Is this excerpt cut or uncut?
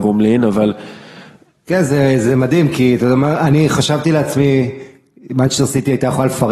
uncut